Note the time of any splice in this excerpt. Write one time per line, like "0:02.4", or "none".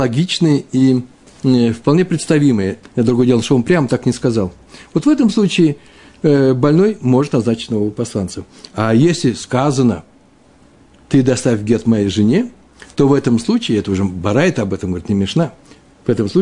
0:02.8